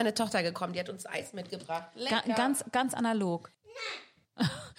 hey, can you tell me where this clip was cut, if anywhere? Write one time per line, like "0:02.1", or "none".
0:03.5